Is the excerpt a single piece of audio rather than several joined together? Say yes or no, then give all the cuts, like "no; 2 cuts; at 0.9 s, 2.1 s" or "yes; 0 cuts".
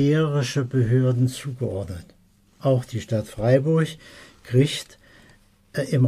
yes; 0 cuts